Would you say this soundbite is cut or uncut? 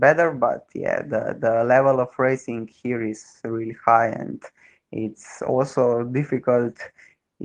uncut